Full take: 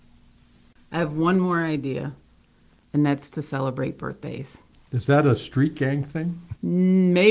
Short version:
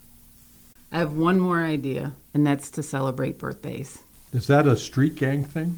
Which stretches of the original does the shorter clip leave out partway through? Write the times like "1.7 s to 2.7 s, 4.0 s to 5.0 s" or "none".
2.2 s to 2.8 s